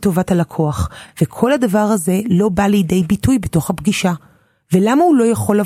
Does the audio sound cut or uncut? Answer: uncut